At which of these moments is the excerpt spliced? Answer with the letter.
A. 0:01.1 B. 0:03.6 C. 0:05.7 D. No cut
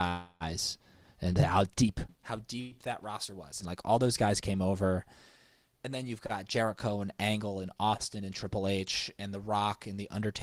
B